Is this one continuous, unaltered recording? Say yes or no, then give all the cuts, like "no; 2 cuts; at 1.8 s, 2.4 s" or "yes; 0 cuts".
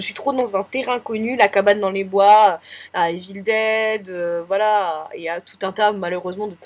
no; 1 cut; at 2.9 s